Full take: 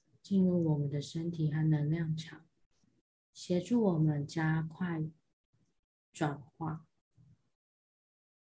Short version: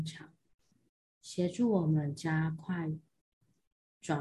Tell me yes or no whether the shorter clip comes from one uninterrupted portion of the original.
yes